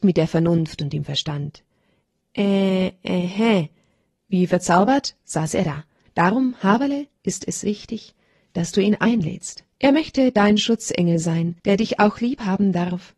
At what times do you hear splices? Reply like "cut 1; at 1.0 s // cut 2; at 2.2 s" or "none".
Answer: cut 1; at 6.1 s // cut 2; at 9.7 s // cut 3; at 11.6 s